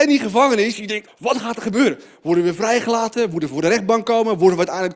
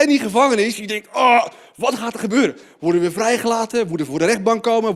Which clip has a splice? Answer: first; 1 cut; at 1.1 s

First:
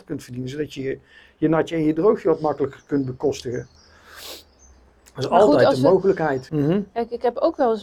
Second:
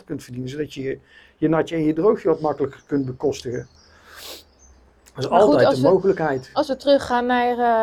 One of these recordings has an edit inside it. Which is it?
first; 1 cut; at 6.5 s

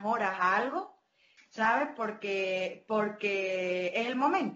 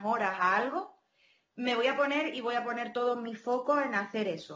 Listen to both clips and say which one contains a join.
first; 1 cut; at 1.4 s

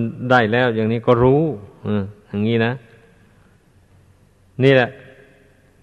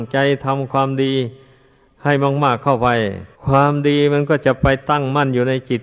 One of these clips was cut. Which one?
second; 1 cut; at 3.3 s

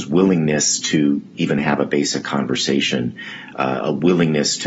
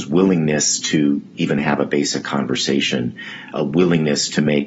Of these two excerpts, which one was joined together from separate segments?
second; 1 cut; at 3.5 s

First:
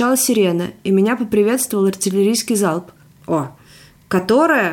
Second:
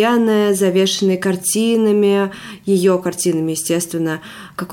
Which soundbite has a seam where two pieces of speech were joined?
first; 1 cut; at 3.2 s

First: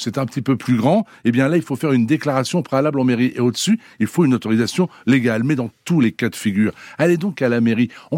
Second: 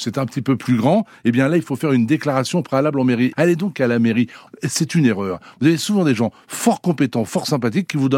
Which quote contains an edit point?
second; 2 cuts; at 3.3 s, 4.5 s

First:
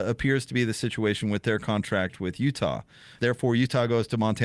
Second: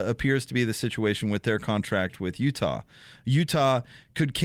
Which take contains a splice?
first; 1 cut; at 3.2 s

